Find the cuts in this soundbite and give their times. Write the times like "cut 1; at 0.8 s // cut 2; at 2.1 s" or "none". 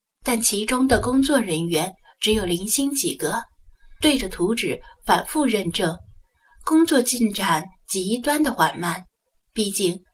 cut 1; at 4.0 s